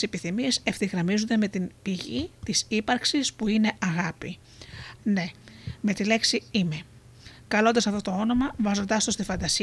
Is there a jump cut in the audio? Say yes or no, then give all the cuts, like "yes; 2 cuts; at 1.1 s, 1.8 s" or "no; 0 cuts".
yes; 1 cut; at 5.0 s